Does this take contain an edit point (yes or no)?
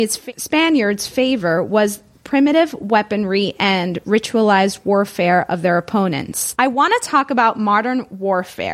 yes